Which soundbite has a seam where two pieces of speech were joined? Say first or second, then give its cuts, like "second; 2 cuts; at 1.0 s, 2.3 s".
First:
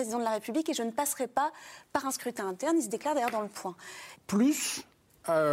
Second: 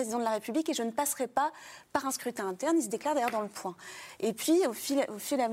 first; 1 cut; at 4.2 s